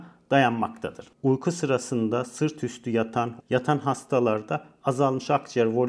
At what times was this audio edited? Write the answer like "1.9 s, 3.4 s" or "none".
3.4 s